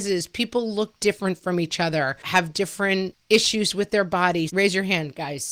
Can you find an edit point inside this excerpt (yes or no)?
yes